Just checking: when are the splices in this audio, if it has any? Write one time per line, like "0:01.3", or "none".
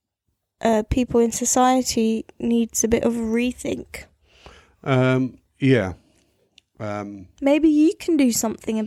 none